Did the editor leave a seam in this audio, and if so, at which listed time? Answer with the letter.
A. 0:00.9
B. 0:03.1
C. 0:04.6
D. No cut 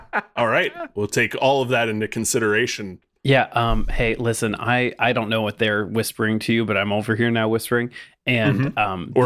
B